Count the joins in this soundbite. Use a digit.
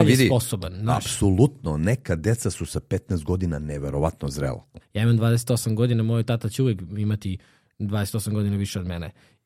1